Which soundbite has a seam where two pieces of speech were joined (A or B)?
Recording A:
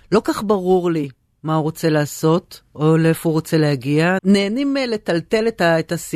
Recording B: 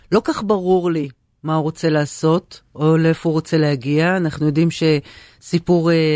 A